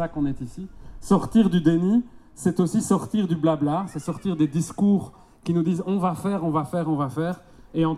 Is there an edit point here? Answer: no; 0 cuts

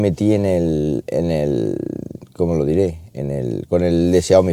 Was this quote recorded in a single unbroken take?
yes; 0 cuts

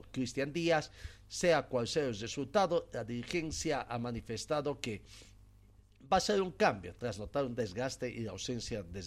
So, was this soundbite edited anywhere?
no; 0 cuts

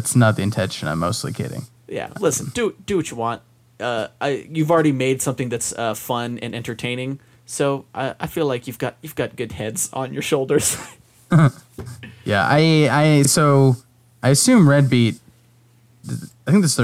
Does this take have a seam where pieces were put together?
no; 0 cuts

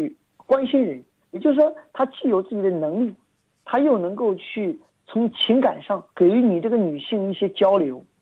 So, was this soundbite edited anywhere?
yes; 2 cuts; at 1.2 s, 6.1 s

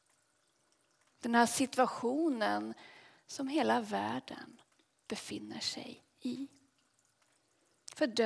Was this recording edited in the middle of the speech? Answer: yes; 1 cut; at 1.1 s

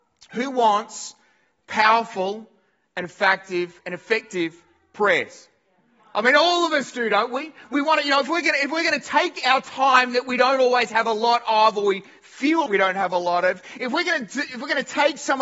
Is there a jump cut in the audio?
yes; 1 cut; at 12.7 s

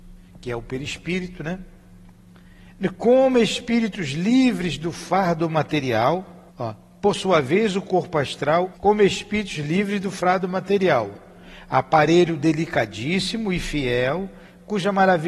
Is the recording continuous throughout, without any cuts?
no; 2 cuts; at 6.5 s, 8.7 s

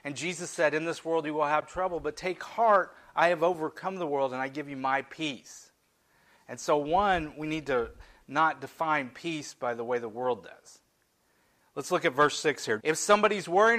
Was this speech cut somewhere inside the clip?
yes; 1 cut; at 12.8 s

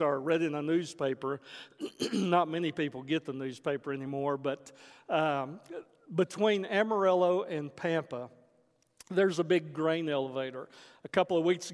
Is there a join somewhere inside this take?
no; 0 cuts

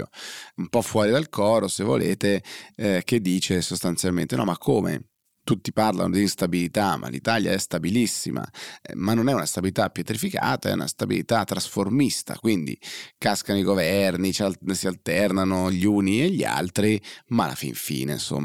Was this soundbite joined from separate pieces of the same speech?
no; 0 cuts

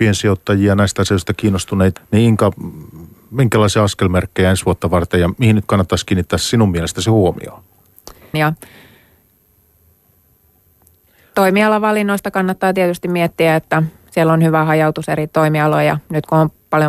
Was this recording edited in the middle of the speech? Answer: yes; 2 cuts; at 2.0 s, 8.3 s

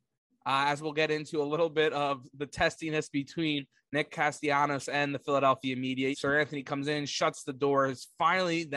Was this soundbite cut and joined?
yes; 1 cut; at 6.1 s

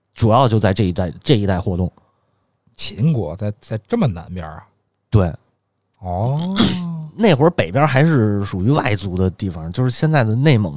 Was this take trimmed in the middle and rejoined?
no; 0 cuts

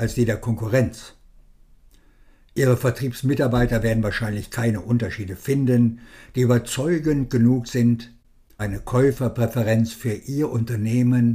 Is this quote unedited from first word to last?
no; 1 cut; at 8.6 s

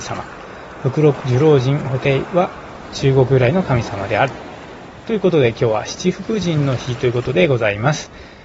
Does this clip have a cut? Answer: yes; 1 cut; at 1.2 s

